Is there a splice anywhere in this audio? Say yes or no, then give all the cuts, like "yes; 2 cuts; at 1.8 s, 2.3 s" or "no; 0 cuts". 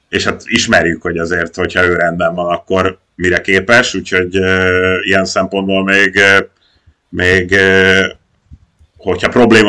no; 0 cuts